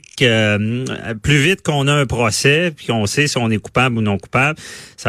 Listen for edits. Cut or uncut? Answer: uncut